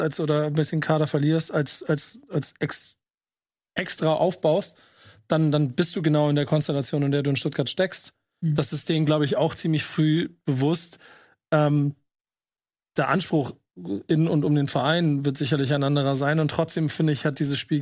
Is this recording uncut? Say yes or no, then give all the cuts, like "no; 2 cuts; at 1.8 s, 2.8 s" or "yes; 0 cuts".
yes; 0 cuts